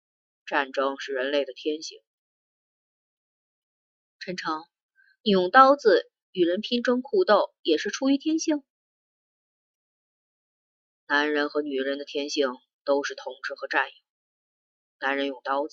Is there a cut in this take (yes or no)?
no